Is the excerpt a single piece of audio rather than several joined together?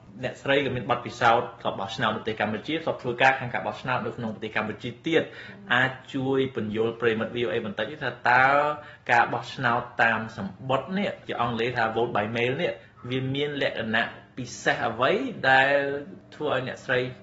yes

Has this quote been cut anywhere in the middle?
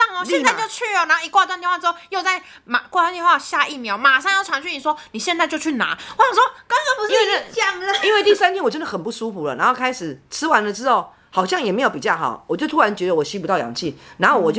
no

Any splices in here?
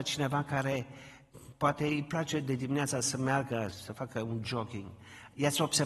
yes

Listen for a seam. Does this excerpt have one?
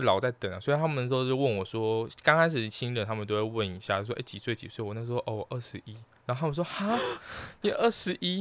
no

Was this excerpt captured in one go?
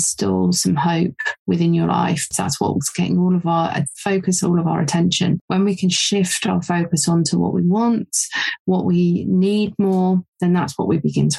no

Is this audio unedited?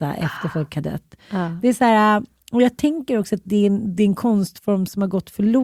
yes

